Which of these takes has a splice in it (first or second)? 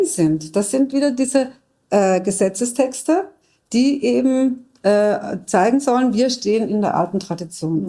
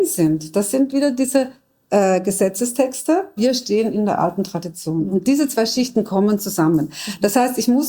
second